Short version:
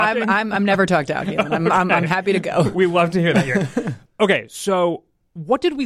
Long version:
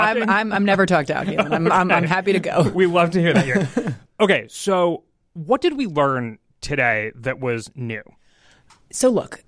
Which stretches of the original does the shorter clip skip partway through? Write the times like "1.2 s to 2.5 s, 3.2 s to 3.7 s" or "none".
none